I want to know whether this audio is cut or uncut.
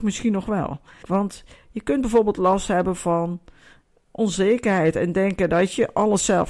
cut